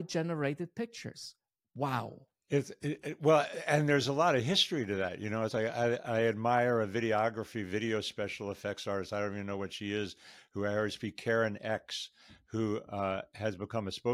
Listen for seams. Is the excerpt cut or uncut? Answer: uncut